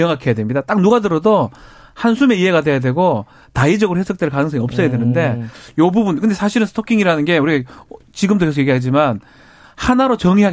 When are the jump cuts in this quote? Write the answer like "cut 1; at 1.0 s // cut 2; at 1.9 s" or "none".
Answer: none